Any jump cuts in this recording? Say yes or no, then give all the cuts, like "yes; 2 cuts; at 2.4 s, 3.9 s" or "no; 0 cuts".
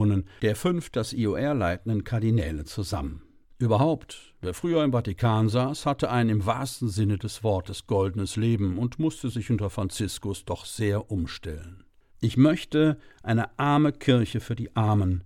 yes; 2 cuts; at 3.4 s, 12.1 s